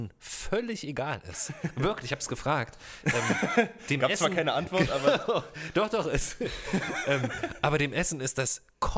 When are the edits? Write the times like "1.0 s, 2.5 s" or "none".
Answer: none